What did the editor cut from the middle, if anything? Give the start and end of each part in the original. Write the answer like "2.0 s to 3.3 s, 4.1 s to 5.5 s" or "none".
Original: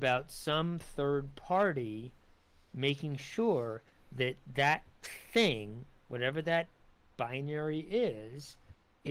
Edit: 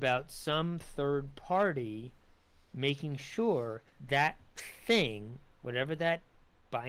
4.0 s to 4.4 s